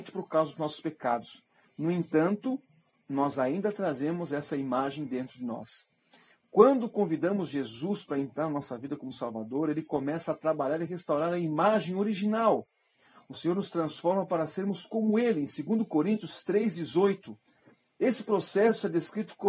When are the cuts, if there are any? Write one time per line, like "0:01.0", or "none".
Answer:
none